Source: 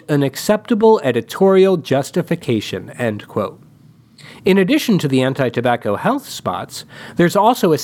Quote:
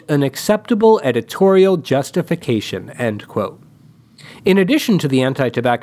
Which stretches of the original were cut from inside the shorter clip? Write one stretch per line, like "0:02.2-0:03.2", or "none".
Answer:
none